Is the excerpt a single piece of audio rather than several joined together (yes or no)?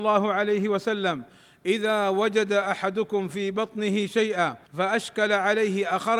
no